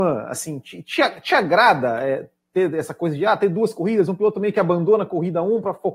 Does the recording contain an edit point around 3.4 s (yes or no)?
no